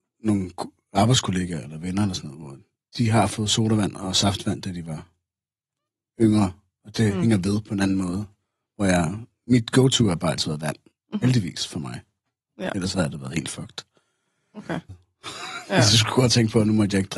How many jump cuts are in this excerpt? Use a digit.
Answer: 1